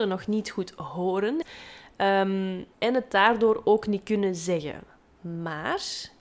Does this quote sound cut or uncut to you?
cut